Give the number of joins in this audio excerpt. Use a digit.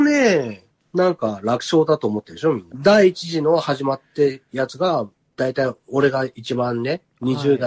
1